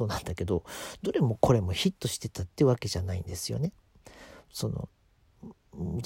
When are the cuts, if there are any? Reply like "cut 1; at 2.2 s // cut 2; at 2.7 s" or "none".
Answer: none